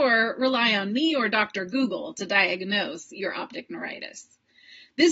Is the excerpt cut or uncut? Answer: uncut